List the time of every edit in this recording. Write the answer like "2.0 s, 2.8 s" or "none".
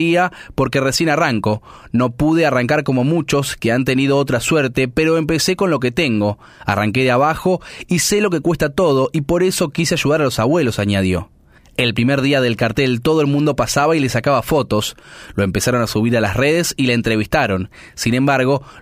none